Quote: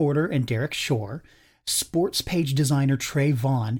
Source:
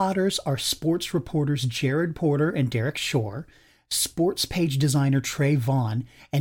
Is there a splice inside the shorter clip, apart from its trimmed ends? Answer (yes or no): no